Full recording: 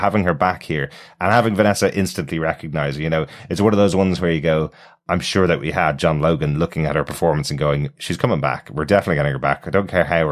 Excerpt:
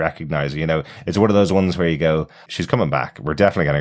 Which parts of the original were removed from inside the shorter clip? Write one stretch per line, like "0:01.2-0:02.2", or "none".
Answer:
0:04.9-0:08.0